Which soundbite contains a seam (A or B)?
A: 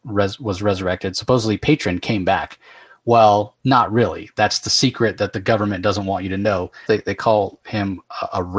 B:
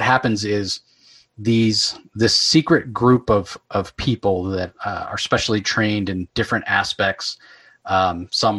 A